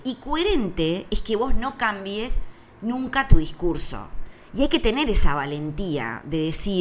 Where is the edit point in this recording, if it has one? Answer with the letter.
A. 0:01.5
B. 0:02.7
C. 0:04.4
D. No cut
C